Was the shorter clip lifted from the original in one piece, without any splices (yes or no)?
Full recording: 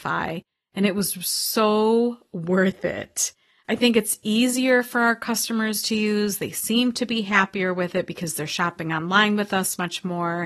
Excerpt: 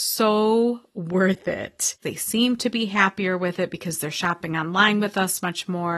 no